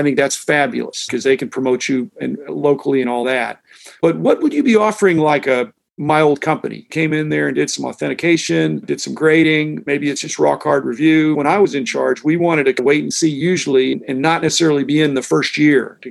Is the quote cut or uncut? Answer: uncut